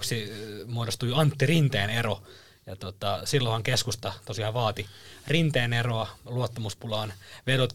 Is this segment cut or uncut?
uncut